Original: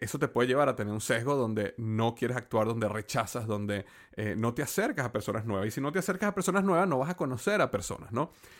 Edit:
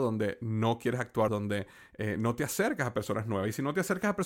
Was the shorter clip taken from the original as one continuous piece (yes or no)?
no